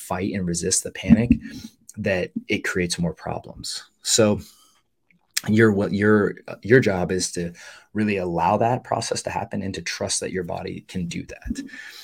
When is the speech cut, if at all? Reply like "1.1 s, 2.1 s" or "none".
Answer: 5.4 s